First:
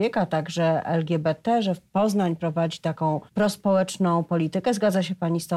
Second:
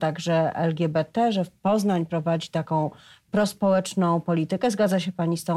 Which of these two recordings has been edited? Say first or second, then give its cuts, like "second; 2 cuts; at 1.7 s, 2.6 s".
first; 1 cut; at 3.3 s